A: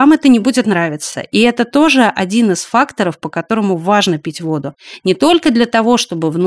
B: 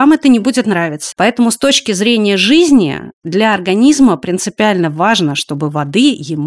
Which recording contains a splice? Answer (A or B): B